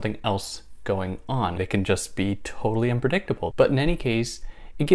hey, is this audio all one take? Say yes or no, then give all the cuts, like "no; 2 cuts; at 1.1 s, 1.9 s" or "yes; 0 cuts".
no; 2 cuts; at 1.6 s, 3.5 s